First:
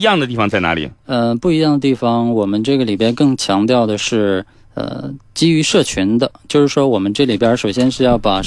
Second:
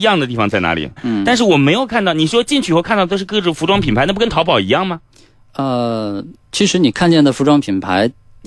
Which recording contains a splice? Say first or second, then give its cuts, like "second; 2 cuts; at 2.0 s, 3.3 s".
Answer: second; 1 cut; at 1.0 s